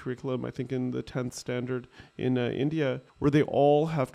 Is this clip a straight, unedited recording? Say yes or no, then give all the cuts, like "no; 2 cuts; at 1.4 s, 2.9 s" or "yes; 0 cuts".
no; 1 cut; at 3.1 s